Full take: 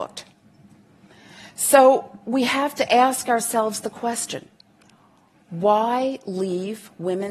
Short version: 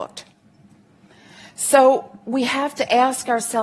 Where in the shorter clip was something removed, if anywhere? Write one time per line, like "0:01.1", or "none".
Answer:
none